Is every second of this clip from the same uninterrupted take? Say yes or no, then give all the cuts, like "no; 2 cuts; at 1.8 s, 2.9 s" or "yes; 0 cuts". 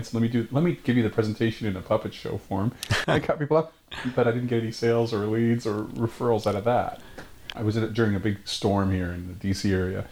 no; 2 cuts; at 3.0 s, 7.5 s